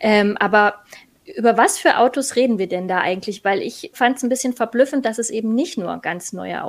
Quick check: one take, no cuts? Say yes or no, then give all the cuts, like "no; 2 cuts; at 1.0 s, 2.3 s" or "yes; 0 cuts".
no; 1 cut; at 3.9 s